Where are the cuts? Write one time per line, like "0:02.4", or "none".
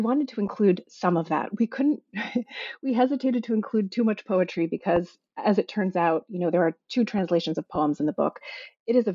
none